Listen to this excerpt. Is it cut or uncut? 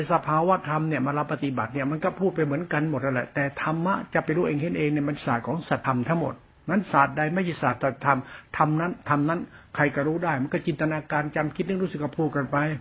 cut